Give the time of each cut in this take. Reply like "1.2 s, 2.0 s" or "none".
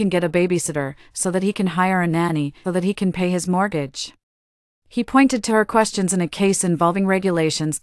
2.6 s, 4.8 s